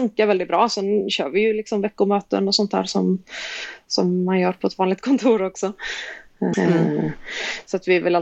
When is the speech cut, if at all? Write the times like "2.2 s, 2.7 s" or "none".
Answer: 6.5 s